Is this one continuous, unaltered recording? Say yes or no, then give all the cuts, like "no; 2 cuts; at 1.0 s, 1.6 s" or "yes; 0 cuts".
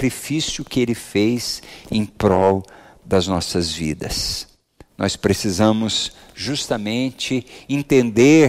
yes; 0 cuts